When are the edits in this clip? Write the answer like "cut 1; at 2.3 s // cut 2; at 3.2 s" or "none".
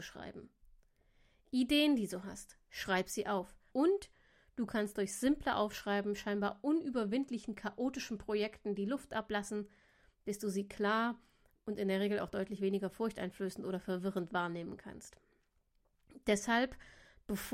cut 1; at 3.7 s